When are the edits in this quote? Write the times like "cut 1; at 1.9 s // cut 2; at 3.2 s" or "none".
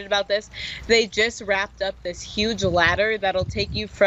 none